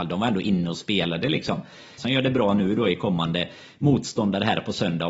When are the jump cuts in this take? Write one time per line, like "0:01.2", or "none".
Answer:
0:02.0